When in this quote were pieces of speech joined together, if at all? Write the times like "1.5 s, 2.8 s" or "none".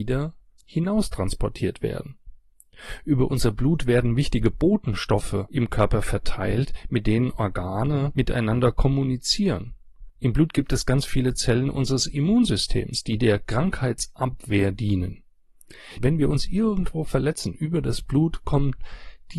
16.0 s